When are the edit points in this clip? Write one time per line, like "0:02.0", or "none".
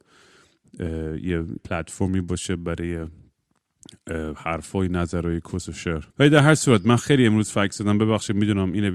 0:01.6
0:06.1